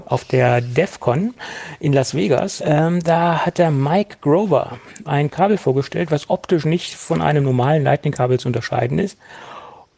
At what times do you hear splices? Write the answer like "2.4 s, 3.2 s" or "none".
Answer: 2.6 s, 5.0 s